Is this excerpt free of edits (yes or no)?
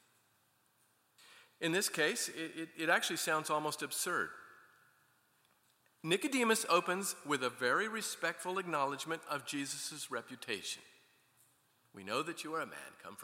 yes